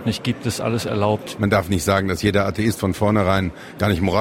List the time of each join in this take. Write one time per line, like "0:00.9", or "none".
0:01.4